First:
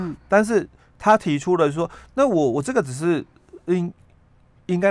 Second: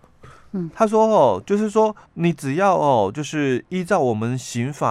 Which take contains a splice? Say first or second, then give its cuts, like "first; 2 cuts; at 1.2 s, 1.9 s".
second; 1 cut; at 2.1 s